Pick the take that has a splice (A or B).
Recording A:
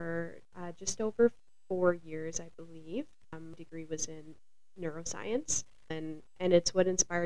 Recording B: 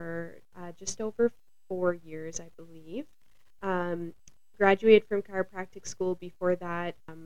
A